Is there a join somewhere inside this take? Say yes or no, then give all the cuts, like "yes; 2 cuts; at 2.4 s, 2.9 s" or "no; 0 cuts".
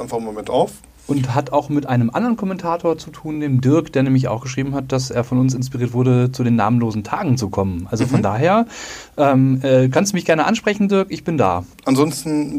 no; 0 cuts